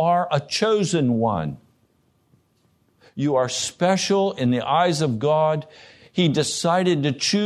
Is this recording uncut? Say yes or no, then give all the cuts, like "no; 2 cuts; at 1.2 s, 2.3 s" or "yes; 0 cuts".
yes; 0 cuts